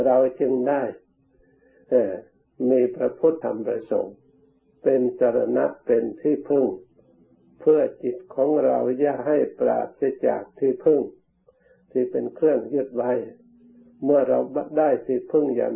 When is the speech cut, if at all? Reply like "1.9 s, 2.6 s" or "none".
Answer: 3.4 s